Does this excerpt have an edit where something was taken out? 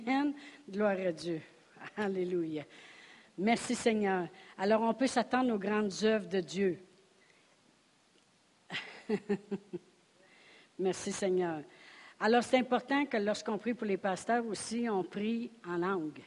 no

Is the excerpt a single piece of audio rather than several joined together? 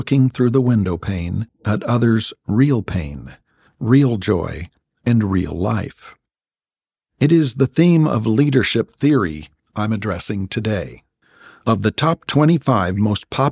yes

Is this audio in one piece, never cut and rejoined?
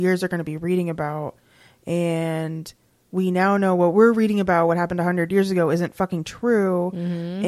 yes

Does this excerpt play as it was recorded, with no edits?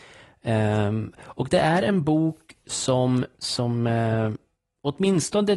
yes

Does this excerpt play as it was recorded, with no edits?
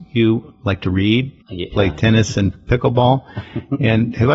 no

